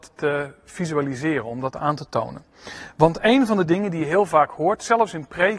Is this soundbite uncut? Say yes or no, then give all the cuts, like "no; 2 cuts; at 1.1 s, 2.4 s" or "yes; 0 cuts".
yes; 0 cuts